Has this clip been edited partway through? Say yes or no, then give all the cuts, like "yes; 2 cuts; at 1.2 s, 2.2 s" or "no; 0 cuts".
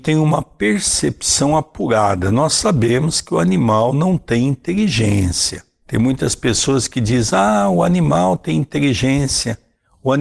no; 0 cuts